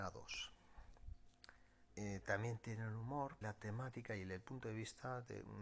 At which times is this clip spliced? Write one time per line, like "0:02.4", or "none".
0:01.9
0:03.4